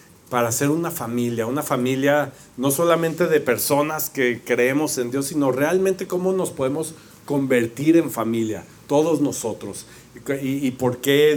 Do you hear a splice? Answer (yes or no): no